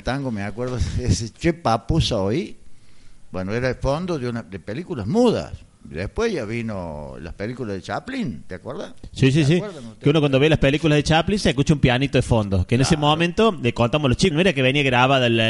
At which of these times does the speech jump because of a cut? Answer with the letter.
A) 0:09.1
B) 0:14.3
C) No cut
B